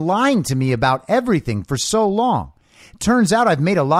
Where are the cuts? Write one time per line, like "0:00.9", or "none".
none